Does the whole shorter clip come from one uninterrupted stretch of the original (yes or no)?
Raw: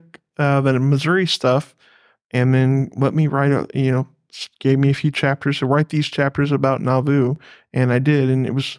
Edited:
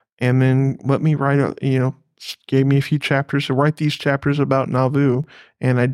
yes